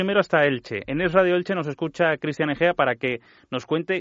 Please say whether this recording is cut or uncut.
uncut